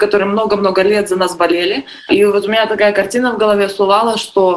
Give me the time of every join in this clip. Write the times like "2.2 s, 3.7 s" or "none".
none